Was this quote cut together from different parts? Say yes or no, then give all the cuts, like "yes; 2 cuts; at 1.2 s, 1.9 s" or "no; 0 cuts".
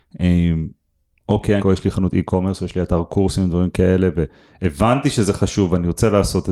yes; 1 cut; at 1.6 s